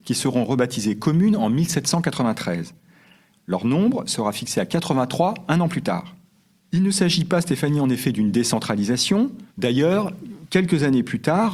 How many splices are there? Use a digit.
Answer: 3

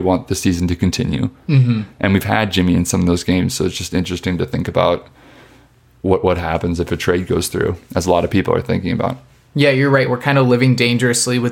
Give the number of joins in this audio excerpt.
0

